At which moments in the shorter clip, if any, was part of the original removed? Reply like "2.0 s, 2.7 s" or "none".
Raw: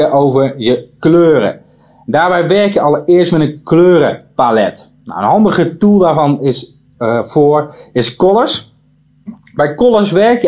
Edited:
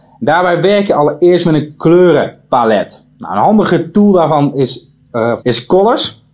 5.4 s